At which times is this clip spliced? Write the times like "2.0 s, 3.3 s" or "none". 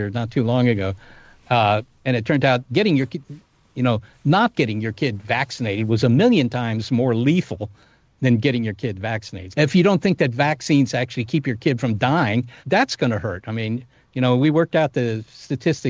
9.5 s, 12.6 s